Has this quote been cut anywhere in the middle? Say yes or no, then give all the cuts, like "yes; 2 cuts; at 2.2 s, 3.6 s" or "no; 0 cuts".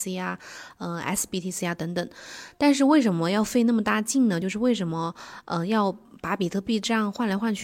no; 0 cuts